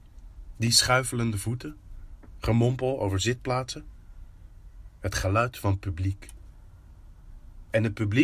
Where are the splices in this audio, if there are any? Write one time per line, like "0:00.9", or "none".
none